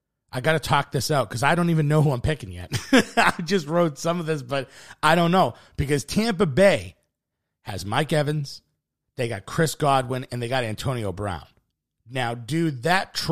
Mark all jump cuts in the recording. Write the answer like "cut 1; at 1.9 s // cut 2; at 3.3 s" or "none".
none